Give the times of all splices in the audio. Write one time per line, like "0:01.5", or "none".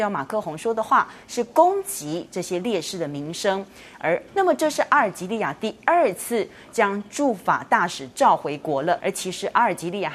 0:04.3
0:09.0

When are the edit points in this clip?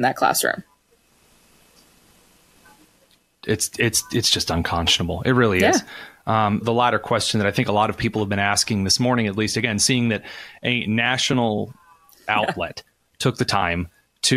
0:06.6

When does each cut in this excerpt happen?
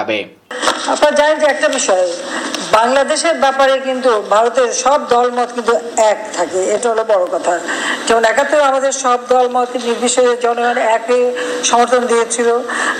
0:06.8

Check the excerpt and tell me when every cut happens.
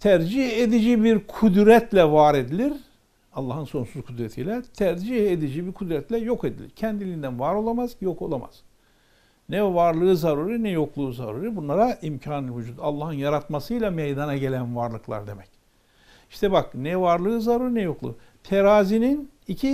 none

